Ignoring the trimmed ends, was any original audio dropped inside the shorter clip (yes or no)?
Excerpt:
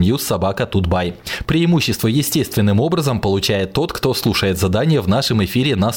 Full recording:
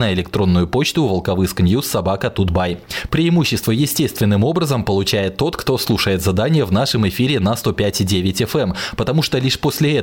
no